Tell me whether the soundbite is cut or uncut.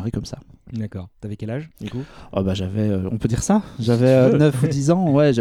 uncut